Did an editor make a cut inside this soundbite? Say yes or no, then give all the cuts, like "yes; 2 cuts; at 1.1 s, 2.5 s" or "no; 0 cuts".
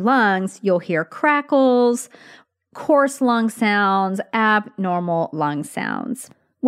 no; 0 cuts